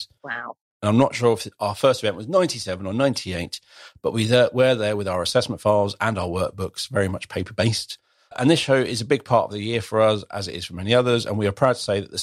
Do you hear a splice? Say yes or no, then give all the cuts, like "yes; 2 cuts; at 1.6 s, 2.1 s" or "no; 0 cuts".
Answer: no; 0 cuts